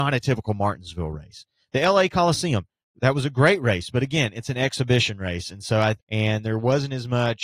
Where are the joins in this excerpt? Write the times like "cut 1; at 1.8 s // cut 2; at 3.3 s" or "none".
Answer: cut 1; at 6.0 s